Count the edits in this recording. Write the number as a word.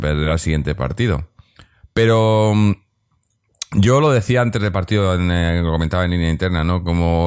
zero